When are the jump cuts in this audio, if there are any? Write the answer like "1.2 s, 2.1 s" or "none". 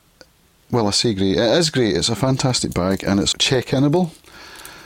3.3 s